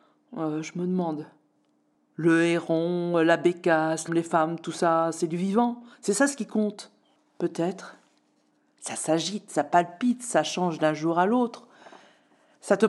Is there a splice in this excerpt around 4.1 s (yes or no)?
yes